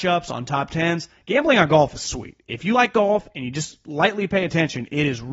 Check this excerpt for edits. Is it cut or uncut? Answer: uncut